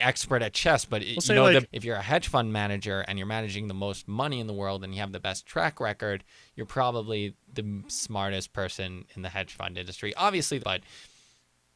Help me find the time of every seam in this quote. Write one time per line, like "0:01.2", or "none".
0:01.6
0:10.6